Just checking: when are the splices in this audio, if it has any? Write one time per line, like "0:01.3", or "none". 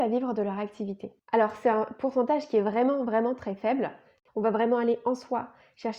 0:01.2
0:04.3